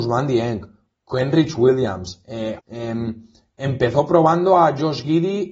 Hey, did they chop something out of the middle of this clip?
yes; 1 cut; at 2.6 s

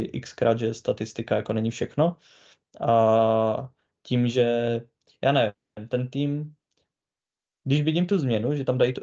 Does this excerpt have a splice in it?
no; 0 cuts

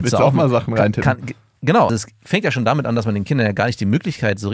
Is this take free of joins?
no; 1 cut; at 1.9 s

